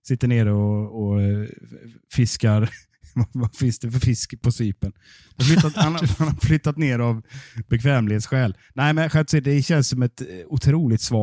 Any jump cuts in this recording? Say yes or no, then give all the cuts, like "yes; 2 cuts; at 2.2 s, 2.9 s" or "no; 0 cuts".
no; 0 cuts